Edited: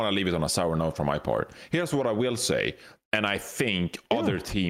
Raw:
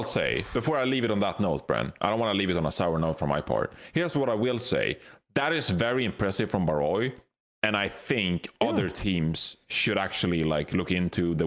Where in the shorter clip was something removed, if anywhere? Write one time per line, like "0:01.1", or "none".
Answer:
0:03.0